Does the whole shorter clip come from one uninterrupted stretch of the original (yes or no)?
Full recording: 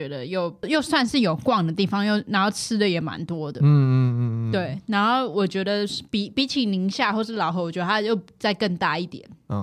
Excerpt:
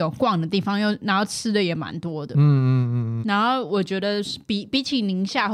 no